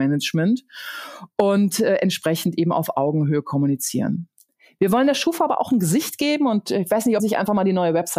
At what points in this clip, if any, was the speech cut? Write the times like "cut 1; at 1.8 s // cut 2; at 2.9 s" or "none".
cut 1; at 7.2 s

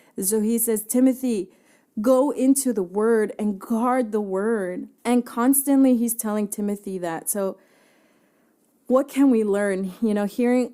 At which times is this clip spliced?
cut 1; at 5.0 s

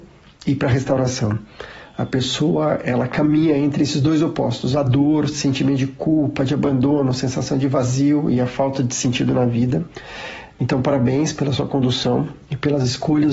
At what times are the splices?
cut 1; at 10.5 s

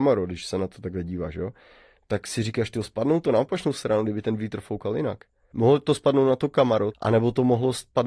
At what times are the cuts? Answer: cut 1; at 5.5 s // cut 2; at 6.9 s

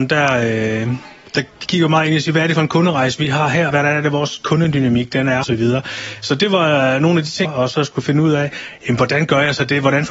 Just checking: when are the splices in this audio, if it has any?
cut 1; at 3.7 s // cut 2; at 5.4 s // cut 3; at 7.5 s

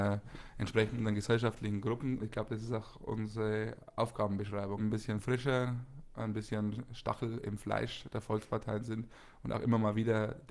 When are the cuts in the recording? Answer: cut 1; at 2.2 s // cut 2; at 4.8 s

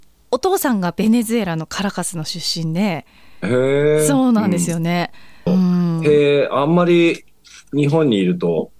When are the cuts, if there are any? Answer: cut 1; at 5.5 s

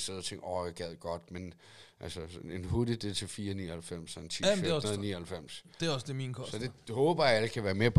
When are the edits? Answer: cut 1; at 4.8 s

